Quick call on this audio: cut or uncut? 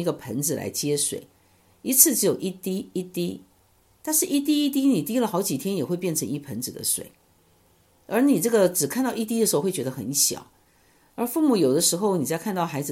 uncut